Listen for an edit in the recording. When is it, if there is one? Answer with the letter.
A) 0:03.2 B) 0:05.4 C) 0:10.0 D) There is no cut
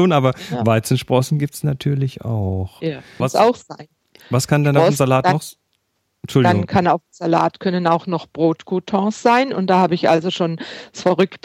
A